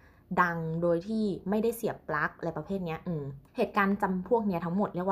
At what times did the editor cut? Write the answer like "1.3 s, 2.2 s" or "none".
3.5 s